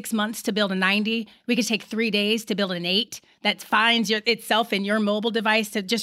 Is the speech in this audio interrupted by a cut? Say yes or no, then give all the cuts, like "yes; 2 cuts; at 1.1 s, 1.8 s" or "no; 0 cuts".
no; 0 cuts